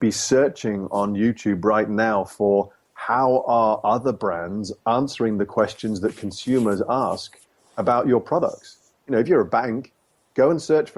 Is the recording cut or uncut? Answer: uncut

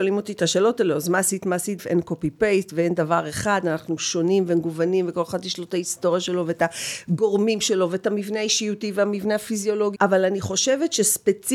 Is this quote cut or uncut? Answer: cut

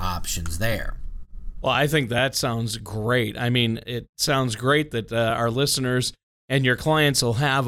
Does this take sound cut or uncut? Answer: uncut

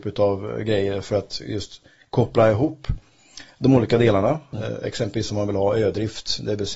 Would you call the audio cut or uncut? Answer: cut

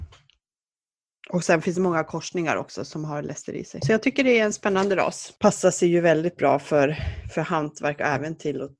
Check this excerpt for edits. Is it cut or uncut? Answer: uncut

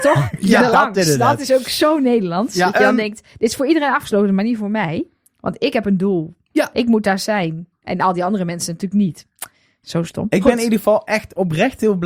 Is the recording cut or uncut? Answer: uncut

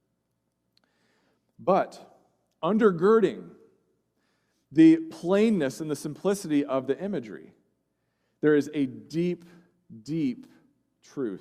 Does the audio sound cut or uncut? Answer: uncut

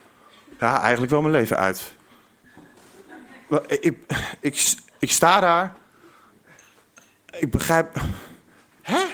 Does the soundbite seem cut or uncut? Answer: uncut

